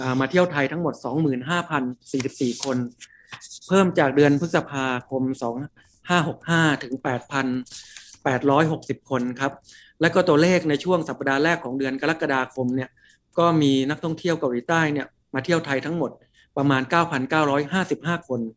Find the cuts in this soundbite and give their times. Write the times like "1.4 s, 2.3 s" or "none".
none